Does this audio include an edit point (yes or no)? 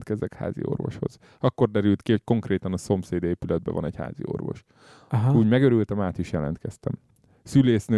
no